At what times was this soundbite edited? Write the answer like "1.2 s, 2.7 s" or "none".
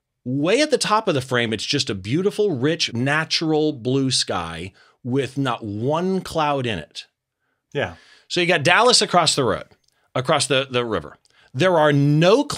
2.9 s, 7.7 s